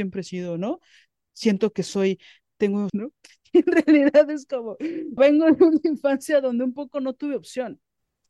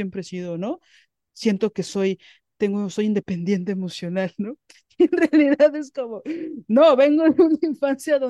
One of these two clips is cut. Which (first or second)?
first